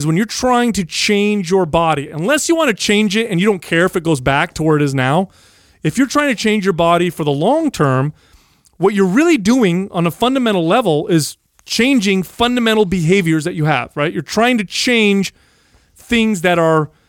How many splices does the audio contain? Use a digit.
0